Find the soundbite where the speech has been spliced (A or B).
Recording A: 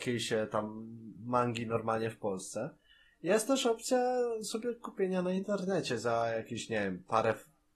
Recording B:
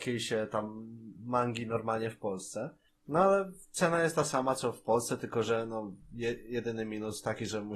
B